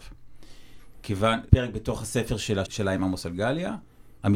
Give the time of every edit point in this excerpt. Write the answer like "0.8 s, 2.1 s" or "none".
1.5 s, 2.7 s